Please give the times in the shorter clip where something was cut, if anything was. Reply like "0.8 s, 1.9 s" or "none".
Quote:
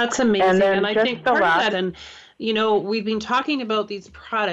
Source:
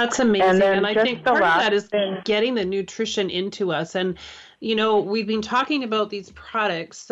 1.7 s